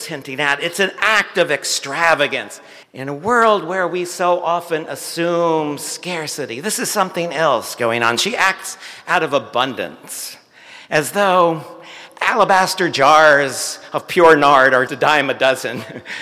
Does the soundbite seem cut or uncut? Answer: cut